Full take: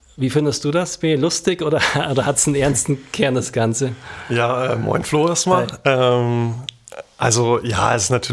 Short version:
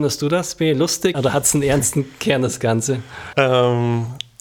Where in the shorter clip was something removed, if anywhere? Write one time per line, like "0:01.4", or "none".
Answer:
0:01.1
0:03.3